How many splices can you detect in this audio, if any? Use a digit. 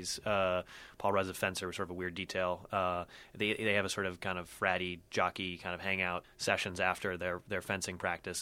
1